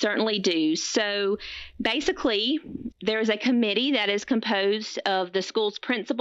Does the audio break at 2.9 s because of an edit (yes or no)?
yes